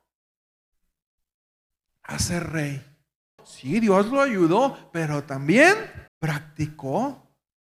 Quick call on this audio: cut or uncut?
cut